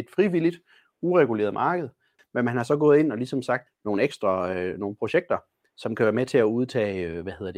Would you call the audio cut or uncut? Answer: cut